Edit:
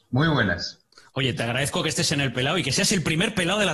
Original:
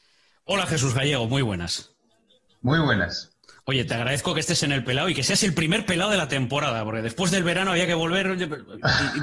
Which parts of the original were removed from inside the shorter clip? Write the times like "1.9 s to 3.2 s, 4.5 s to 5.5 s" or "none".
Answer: none

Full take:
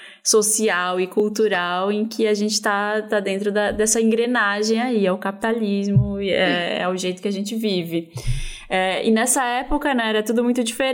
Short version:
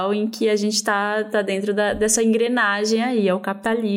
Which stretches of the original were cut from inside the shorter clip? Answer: none

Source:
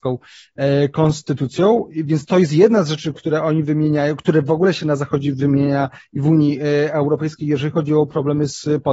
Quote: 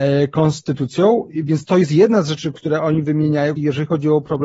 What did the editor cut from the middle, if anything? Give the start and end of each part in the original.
4.2 s to 7.4 s

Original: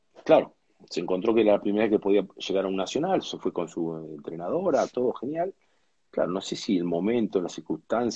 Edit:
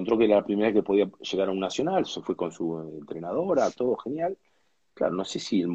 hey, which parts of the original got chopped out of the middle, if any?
none

